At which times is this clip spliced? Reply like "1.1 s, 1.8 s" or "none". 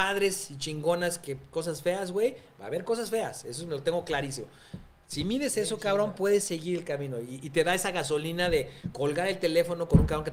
none